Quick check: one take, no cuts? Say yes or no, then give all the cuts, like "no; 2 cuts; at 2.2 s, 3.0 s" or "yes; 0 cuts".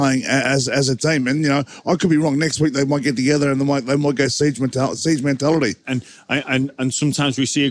no; 1 cut; at 5.8 s